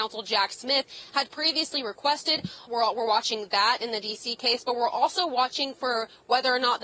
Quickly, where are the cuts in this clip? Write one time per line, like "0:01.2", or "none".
0:02.7